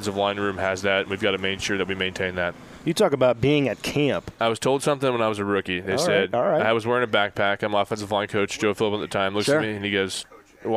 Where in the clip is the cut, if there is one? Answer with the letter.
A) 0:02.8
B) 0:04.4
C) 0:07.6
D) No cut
B